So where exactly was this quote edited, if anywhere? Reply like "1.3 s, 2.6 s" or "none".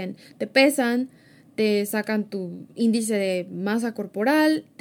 none

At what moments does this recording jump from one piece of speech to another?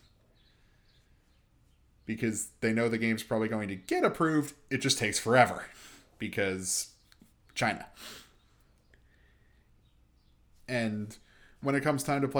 10.5 s

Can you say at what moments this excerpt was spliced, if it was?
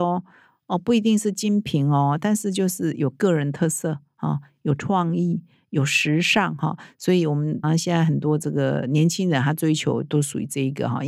7.6 s

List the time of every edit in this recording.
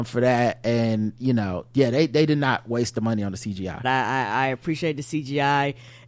3.8 s

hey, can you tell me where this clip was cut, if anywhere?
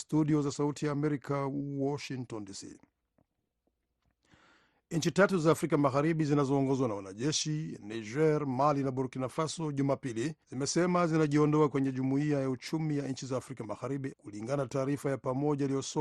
10.4 s, 14.1 s

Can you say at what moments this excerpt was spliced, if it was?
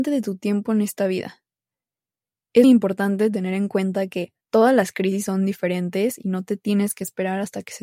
2.6 s, 4.4 s

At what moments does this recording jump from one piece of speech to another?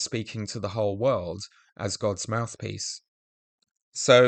none

